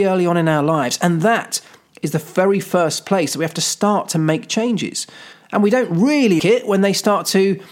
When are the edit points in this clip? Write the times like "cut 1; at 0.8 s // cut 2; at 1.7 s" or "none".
cut 1; at 5.3 s // cut 2; at 6.4 s